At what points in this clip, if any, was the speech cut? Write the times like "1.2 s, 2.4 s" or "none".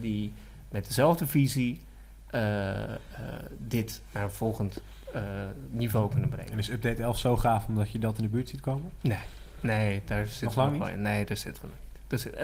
none

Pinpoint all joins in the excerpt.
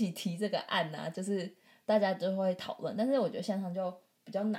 none

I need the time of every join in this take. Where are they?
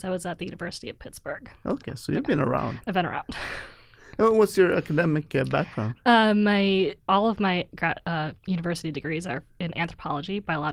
7.0 s, 8.4 s

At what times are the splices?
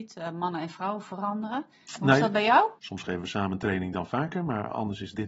2.8 s

